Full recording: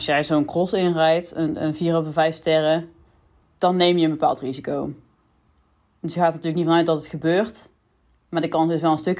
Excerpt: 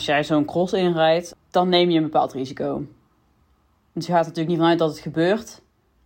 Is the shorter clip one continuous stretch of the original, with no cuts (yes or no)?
no